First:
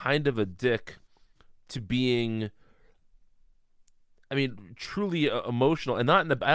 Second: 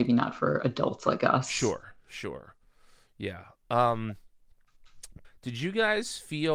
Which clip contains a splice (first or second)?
second